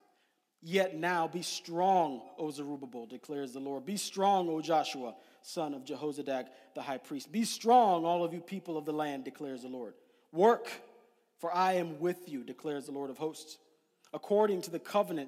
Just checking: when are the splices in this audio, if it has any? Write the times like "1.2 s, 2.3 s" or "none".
none